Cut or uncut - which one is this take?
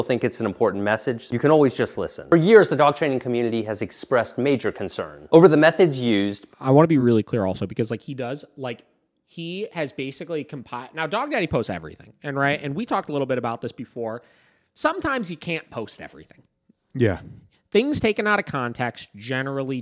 uncut